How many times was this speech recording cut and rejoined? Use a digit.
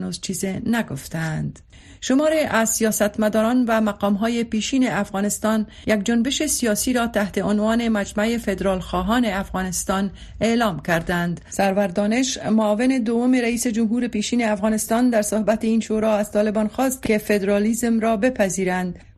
0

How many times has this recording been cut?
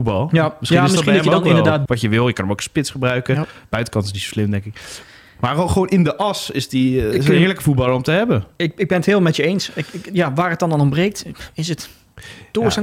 1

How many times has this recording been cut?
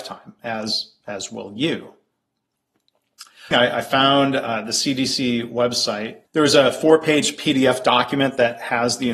2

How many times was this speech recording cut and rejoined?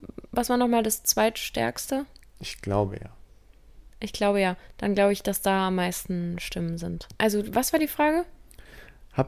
1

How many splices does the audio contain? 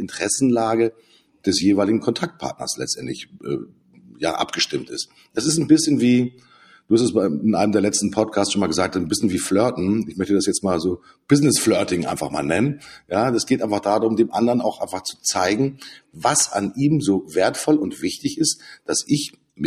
0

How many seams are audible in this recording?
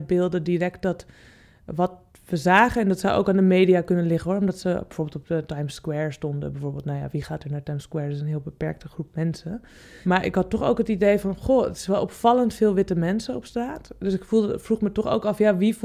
0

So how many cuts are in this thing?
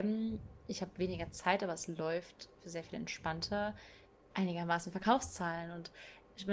1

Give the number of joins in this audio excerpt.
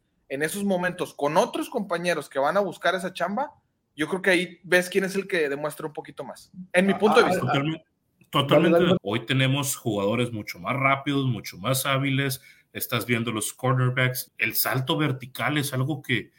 2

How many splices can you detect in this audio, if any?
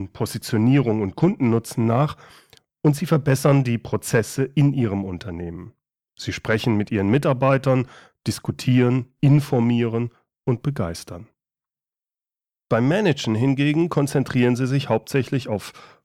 0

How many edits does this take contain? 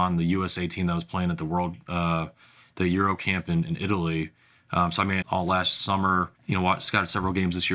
2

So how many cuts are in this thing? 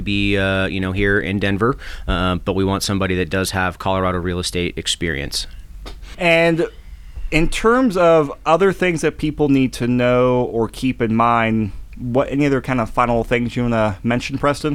1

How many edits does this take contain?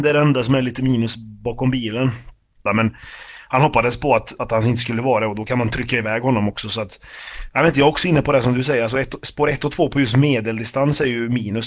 1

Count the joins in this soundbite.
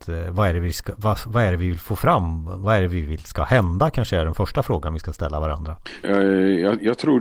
1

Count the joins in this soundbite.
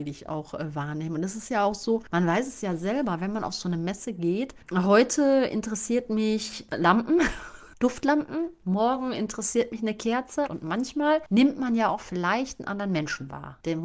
1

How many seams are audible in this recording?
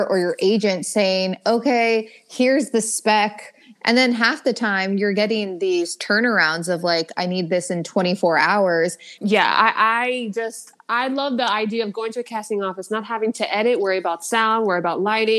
2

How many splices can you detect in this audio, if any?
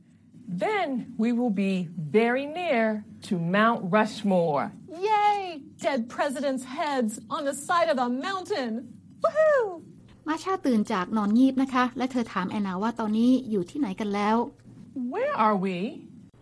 0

